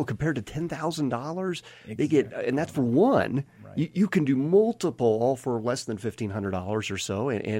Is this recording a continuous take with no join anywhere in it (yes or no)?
yes